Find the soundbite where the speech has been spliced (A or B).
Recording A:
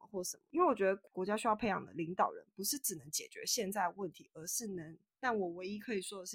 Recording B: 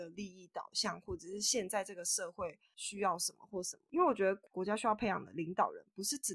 A